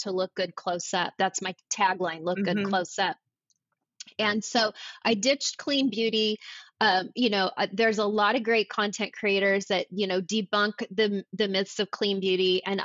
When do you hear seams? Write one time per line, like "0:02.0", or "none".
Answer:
none